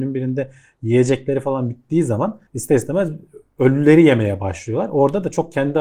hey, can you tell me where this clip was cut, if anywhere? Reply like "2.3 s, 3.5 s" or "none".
2.5 s